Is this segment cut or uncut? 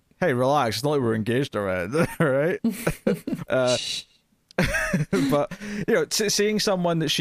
cut